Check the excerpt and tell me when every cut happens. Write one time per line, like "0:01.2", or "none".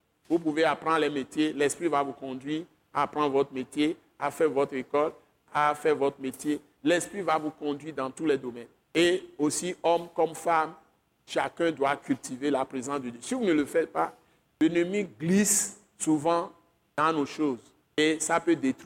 none